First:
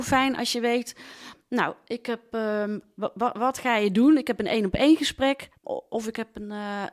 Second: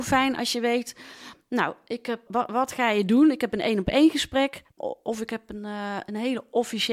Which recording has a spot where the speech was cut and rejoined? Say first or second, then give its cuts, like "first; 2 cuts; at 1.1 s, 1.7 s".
second; 1 cut; at 2.3 s